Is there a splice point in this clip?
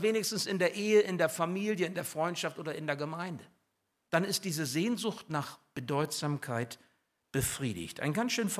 yes; 1 cut; at 4.0 s

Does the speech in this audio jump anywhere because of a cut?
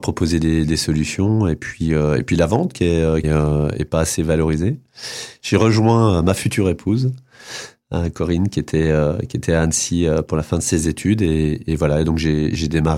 yes; 2 cuts; at 3.2 s, 5.4 s

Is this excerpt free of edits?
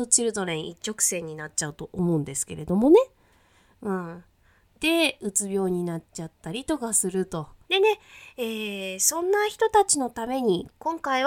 no; 2 cuts; at 4.6 s, 7.6 s

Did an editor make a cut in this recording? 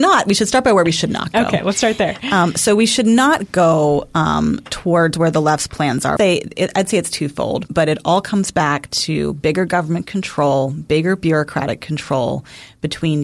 yes; 2 cuts; at 6.2 s, 7.7 s

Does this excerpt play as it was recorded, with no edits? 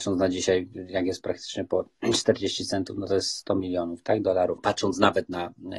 no; 1 cut; at 4.6 s

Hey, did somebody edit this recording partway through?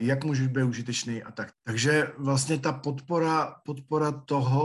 yes; 1 cut; at 1.5 s

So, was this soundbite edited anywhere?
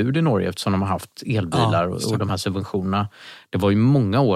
no; 0 cuts

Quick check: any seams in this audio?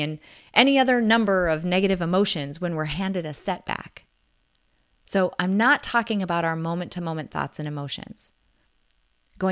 no; 0 cuts

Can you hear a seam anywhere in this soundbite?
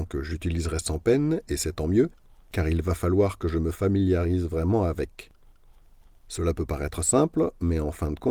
no; 0 cuts

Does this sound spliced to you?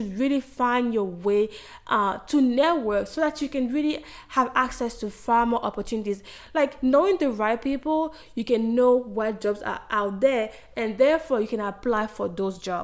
no; 0 cuts

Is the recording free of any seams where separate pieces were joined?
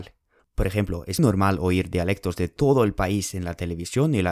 no; 1 cut; at 1.2 s

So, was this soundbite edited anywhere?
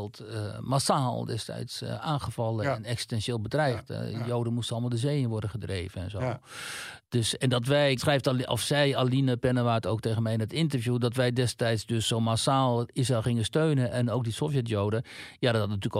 yes; 1 cut; at 8.0 s

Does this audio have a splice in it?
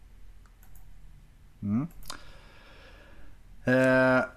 no; 0 cuts

